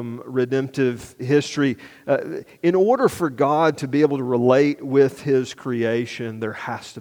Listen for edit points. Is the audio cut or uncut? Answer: uncut